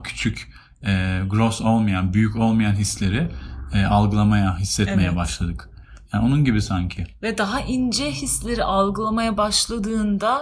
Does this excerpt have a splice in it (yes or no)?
no